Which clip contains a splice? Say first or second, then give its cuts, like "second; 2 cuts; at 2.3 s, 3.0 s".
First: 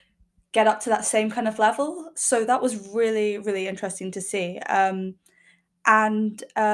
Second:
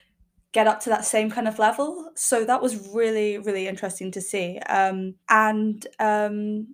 second; 1 cut; at 5.2 s